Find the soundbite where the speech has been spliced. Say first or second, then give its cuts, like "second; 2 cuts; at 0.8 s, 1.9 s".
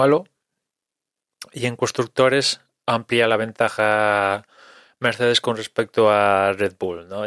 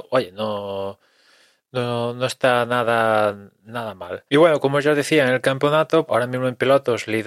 second; 2 cuts; at 4.3 s, 6.1 s